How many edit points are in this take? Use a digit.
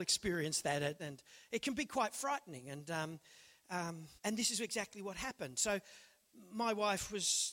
2